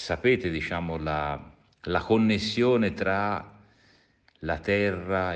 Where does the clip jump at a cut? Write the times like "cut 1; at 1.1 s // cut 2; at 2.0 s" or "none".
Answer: none

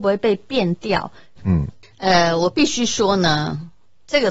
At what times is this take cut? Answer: cut 1; at 1.4 s

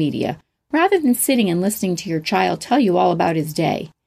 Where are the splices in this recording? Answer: none

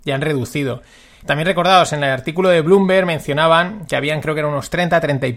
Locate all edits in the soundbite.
cut 1; at 1.2 s

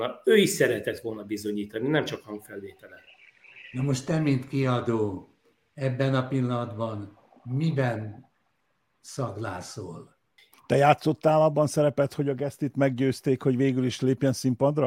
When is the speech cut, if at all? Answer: cut 1; at 10.5 s

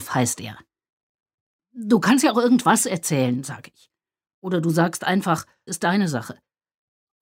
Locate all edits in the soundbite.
cut 1; at 5.7 s

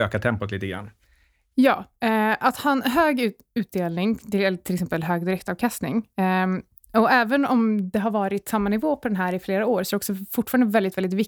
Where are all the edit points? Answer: cut 1; at 1.5 s // cut 2; at 9.4 s

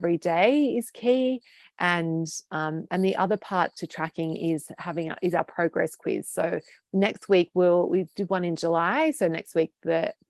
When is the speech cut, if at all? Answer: none

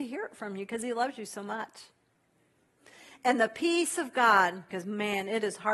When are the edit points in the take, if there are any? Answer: cut 1; at 4.7 s

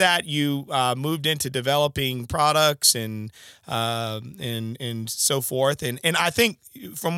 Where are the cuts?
none

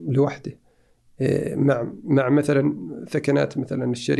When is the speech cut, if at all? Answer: none

